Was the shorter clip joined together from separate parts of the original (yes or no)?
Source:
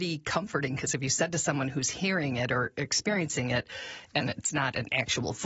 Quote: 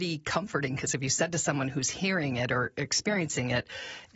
no